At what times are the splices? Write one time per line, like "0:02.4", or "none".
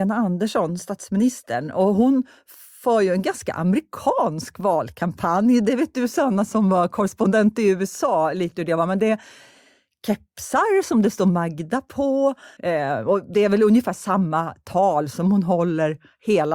0:12.6